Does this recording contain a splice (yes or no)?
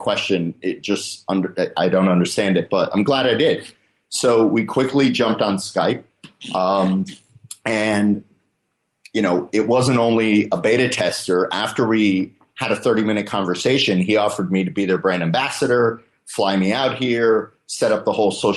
no